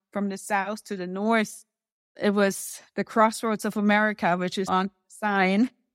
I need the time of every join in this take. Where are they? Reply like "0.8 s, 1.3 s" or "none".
4.7 s